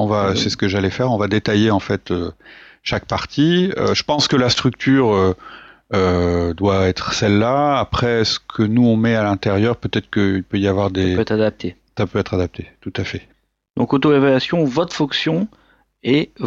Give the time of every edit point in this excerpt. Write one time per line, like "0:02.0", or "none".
none